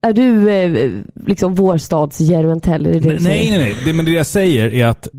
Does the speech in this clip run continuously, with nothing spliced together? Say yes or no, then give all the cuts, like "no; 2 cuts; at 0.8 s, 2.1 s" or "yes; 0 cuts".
yes; 0 cuts